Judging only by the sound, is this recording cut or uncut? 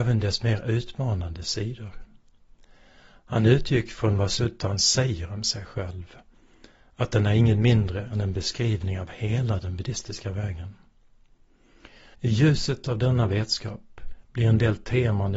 cut